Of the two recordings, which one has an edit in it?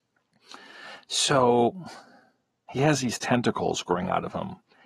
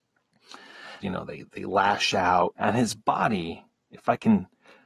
second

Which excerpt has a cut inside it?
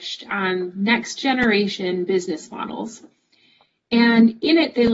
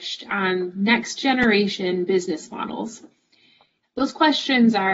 second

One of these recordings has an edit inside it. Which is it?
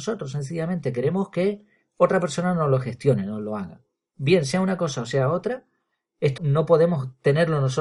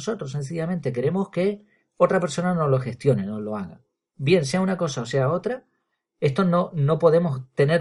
first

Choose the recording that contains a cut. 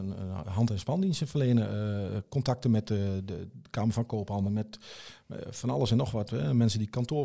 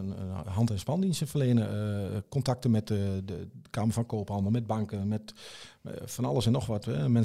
first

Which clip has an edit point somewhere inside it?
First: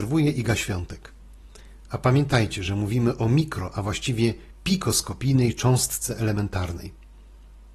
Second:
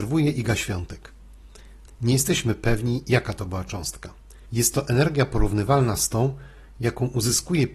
second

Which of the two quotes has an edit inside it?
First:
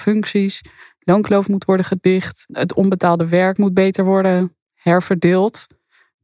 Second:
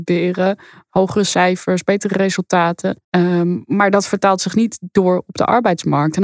first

